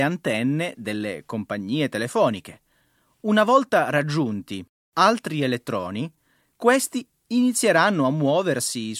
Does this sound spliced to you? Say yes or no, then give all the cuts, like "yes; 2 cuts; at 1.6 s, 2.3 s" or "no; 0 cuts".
no; 0 cuts